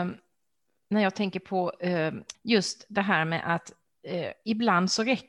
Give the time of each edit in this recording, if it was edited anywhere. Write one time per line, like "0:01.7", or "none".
0:02.3